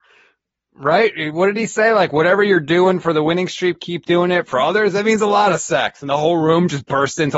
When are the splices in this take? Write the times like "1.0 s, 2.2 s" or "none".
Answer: 4.5 s